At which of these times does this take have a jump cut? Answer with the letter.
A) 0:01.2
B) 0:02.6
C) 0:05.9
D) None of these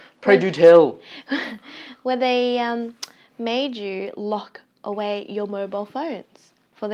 D